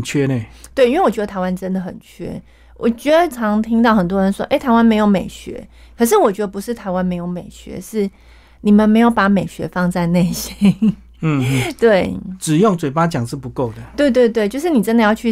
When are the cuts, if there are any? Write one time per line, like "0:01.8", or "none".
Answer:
0:03.3